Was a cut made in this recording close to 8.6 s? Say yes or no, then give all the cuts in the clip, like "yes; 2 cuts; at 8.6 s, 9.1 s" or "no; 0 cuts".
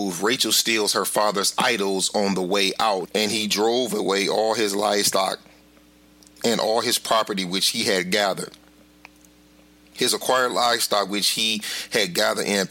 no; 1 cut; at 3.0 s